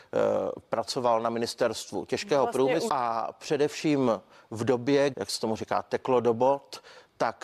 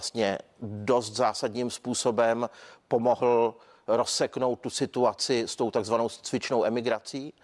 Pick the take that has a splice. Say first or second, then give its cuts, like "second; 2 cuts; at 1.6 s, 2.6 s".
first; 2 cuts; at 2.9 s, 5.1 s